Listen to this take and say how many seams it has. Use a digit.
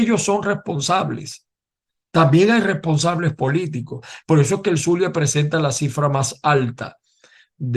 1